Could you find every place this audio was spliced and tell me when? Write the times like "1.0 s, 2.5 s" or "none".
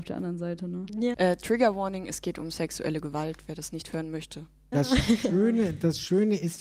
1.1 s, 4.7 s